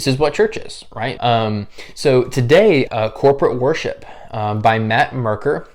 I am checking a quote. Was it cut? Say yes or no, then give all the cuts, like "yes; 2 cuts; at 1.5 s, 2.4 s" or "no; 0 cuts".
yes; 2 cuts; at 1.2 s, 2.9 s